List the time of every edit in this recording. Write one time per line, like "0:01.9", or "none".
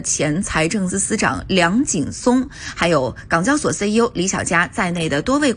0:00.9

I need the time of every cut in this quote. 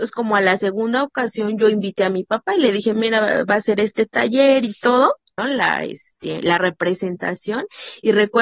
0:05.4

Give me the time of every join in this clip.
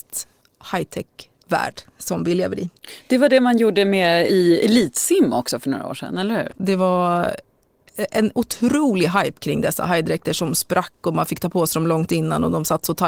0:04.3
0:06.5

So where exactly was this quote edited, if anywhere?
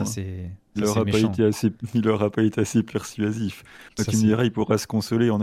none

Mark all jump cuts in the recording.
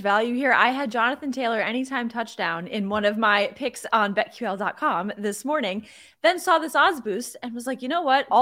none

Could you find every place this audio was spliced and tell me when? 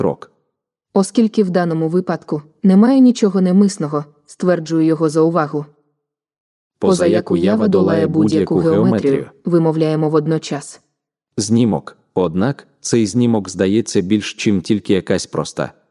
none

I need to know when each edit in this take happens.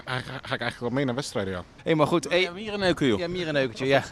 0:01.8

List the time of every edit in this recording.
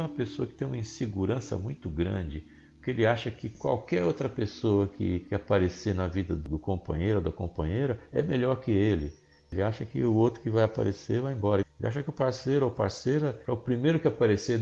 0:11.6

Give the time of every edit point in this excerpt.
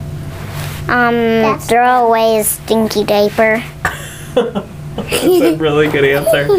none

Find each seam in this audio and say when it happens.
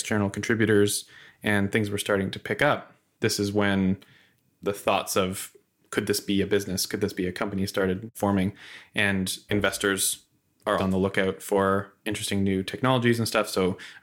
0:10.8

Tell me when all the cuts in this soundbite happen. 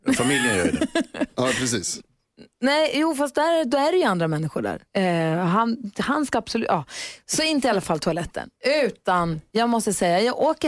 0:04.9

